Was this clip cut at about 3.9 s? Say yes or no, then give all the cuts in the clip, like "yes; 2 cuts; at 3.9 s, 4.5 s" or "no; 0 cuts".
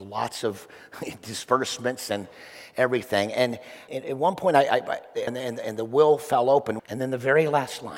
yes; 3 cuts; at 3.9 s, 5.3 s, 6.8 s